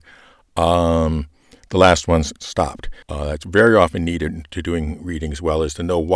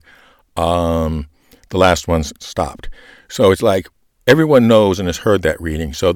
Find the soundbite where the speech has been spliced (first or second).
first